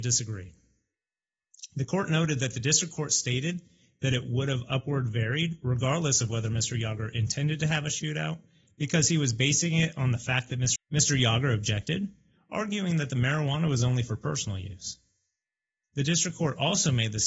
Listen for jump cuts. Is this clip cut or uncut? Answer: cut